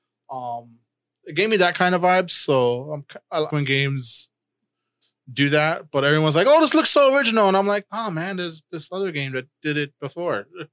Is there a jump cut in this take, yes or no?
yes